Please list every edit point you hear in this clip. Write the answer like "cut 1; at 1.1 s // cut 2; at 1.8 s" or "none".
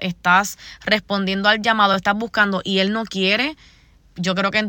none